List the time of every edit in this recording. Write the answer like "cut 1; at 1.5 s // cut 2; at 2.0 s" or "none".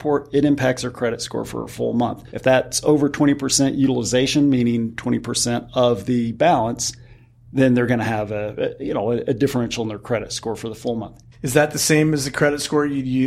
cut 1; at 2.3 s // cut 2; at 11.3 s